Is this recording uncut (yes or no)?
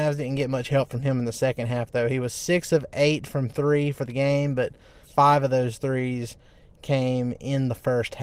no